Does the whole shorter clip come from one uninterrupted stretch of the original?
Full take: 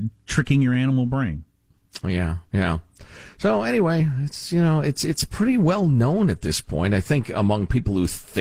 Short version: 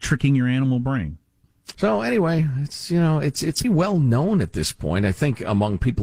no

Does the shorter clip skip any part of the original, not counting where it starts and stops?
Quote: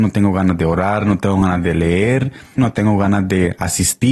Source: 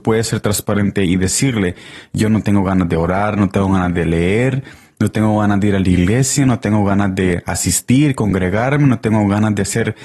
yes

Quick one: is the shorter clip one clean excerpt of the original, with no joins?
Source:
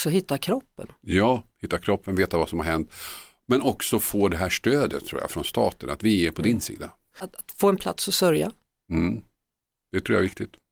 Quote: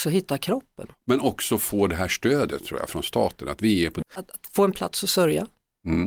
no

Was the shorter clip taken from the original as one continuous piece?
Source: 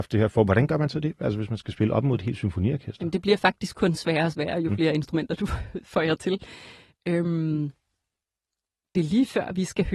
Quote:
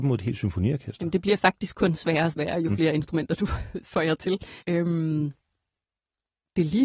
no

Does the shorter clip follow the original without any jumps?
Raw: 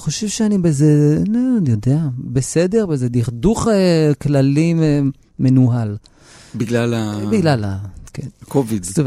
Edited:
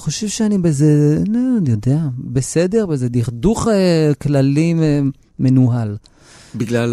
yes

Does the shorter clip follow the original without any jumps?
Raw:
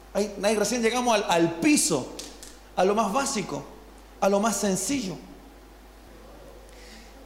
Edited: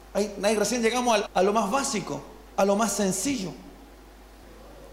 no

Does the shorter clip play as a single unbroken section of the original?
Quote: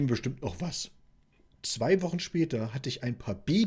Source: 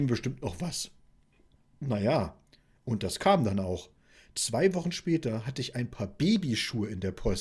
no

